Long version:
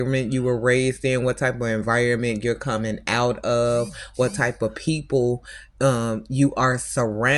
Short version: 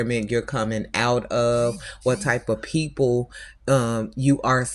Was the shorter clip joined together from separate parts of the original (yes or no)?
no